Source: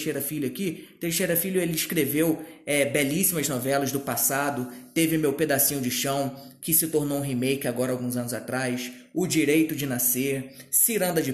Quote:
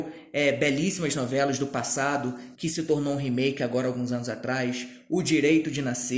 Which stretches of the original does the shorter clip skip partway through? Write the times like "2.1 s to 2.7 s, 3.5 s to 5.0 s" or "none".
4.9 s to 6.6 s